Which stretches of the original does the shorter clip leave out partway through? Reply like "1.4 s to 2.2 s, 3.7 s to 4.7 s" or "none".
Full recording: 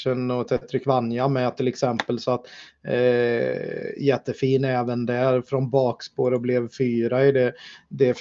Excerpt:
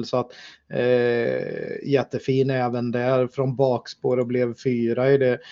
none